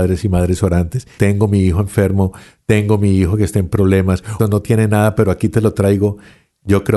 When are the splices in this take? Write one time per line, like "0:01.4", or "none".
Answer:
0:01.2
0:04.4

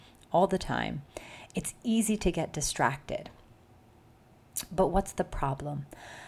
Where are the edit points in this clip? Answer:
none

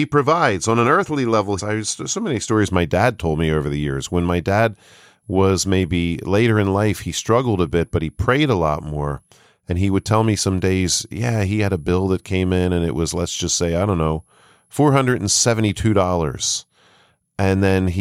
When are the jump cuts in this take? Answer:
0:01.6

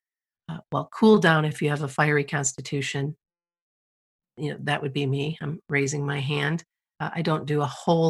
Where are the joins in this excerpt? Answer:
none

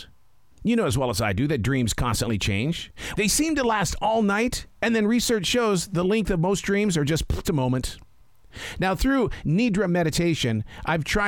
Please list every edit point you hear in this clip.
0:03.1
0:07.4

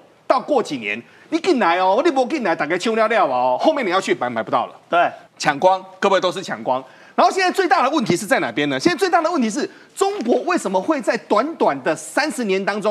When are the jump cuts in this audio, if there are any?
0:05.3

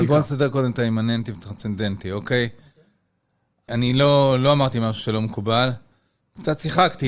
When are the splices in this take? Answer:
none

